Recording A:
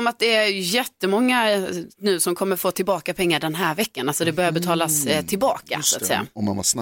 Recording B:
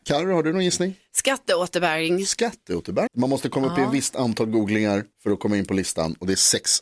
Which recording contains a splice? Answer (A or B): B